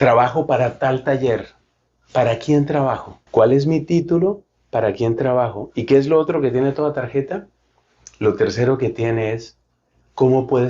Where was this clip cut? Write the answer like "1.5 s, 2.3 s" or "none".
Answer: 3.3 s